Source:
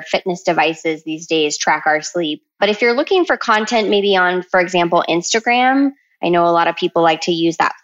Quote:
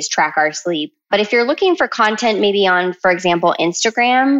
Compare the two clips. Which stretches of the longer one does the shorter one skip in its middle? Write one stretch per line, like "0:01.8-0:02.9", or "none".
none